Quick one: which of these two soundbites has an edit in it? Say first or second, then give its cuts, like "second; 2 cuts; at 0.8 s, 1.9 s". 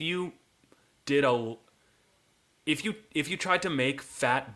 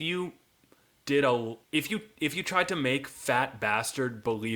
second; 1 cut; at 1.6 s